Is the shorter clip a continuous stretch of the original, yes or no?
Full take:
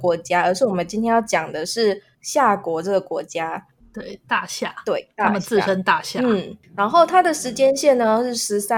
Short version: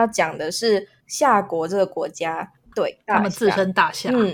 no